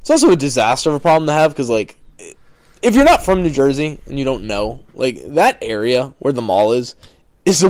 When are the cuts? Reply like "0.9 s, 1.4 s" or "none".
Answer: none